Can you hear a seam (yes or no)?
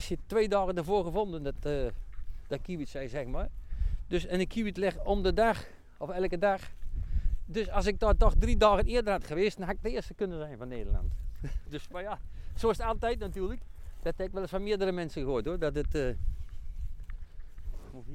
no